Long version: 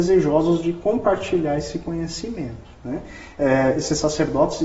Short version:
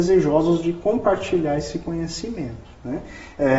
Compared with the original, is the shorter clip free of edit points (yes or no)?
yes